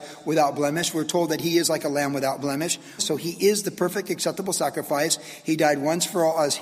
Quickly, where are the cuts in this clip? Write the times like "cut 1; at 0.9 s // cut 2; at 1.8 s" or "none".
cut 1; at 3.0 s

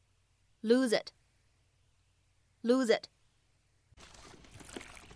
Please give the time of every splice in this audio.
none

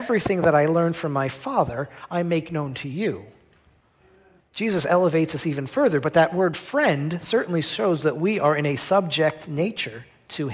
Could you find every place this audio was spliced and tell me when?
cut 1; at 4.4 s

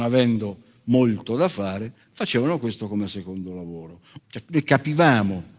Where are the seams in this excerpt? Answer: cut 1; at 4.2 s

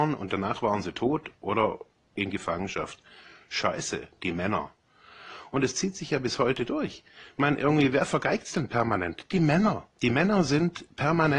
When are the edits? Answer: cut 1; at 9.9 s

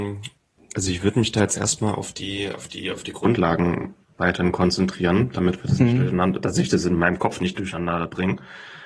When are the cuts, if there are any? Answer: none

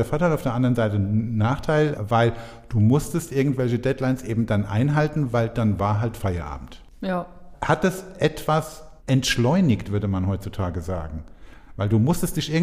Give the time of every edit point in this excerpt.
cut 1; at 9.0 s

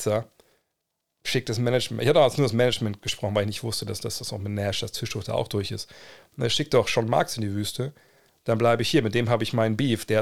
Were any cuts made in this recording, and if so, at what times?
none

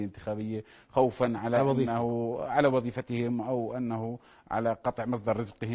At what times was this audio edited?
none

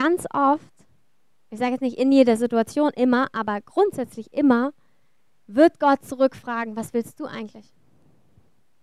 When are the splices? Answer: none

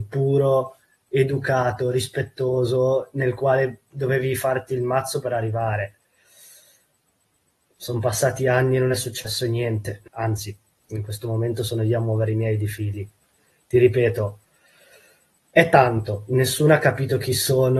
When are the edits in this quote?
cut 1; at 10.1 s

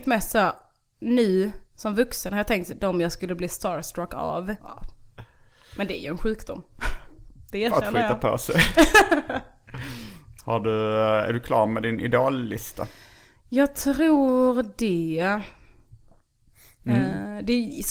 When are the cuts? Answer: cut 1; at 4.6 s

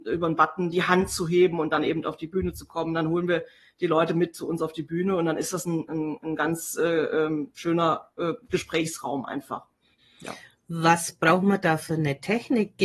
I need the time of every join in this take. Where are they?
none

